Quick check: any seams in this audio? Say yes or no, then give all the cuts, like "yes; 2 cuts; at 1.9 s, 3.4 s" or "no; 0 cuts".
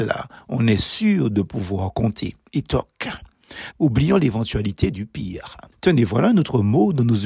yes; 2 cuts; at 2.5 s, 3.7 s